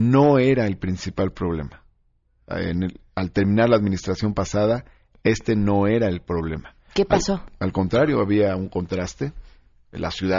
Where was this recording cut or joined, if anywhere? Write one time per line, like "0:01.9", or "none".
none